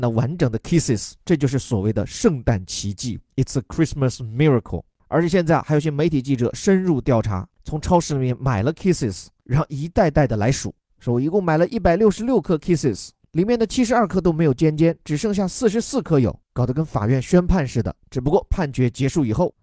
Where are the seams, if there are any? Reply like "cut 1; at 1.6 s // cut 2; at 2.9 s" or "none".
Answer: none

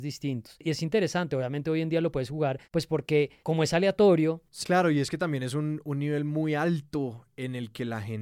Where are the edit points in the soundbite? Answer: cut 1; at 4.6 s

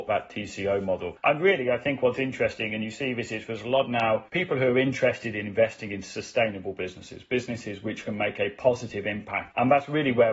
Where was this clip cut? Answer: none

